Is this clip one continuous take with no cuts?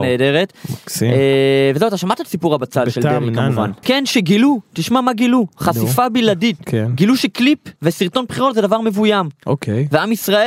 no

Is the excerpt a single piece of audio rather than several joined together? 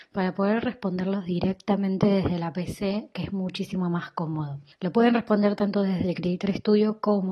yes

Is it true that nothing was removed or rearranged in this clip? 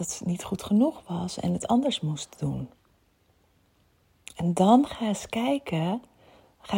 yes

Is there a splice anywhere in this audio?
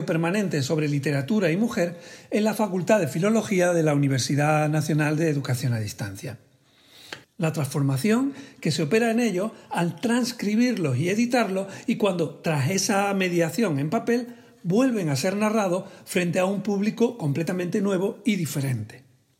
yes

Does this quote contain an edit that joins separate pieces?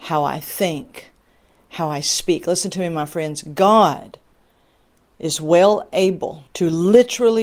yes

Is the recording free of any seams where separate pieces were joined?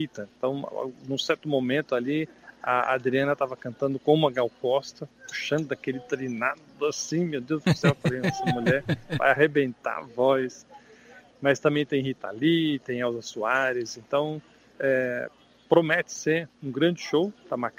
yes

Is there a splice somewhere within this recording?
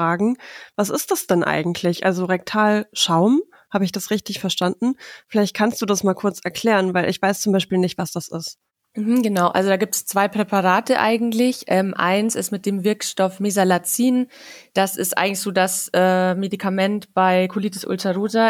no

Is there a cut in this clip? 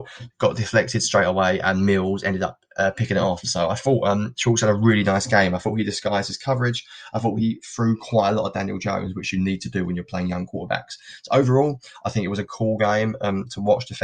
no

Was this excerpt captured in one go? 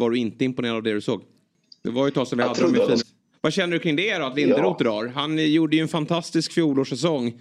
no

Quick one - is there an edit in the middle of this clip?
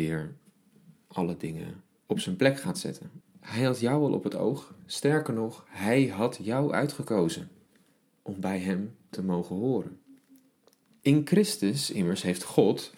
yes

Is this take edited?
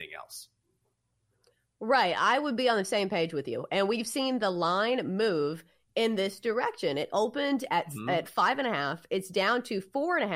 no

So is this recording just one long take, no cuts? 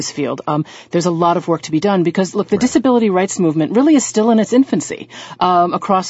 yes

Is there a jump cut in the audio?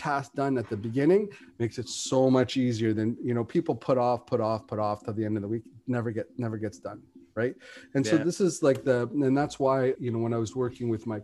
yes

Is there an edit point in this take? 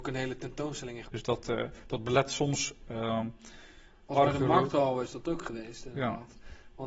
yes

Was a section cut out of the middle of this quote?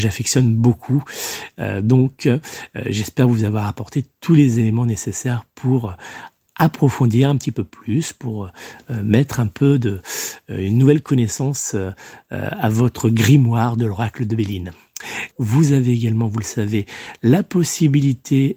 yes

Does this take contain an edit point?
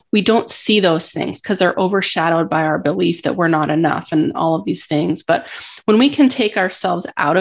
no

